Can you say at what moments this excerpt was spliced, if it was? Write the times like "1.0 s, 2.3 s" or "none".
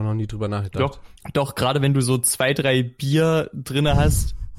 1.2 s